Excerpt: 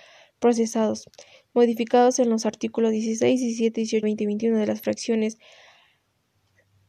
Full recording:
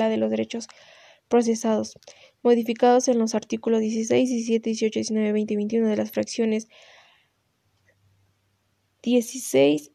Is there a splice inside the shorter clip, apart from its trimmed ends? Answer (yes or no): yes